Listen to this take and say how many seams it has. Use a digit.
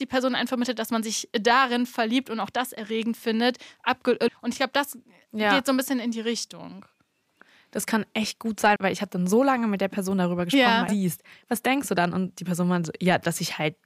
3